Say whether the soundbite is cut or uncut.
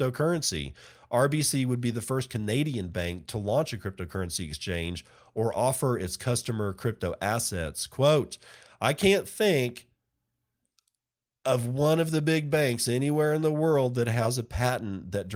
uncut